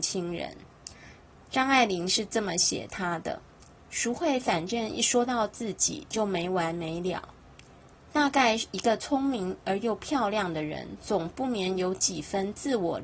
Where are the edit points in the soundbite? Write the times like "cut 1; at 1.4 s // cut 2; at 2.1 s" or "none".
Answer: cut 1; at 3.8 s